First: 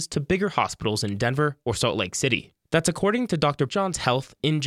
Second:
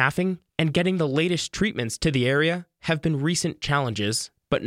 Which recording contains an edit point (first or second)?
first